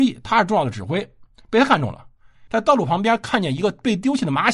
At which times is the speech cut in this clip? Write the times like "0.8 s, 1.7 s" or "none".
2.5 s